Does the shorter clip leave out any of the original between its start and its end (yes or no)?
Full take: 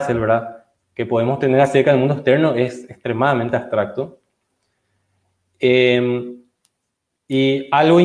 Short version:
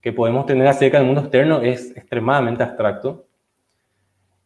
no